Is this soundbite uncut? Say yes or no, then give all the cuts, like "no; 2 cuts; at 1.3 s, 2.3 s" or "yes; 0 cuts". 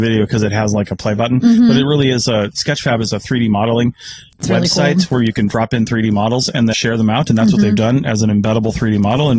no; 1 cut; at 6.7 s